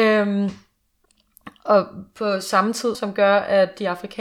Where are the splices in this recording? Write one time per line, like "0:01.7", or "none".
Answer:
0:02.9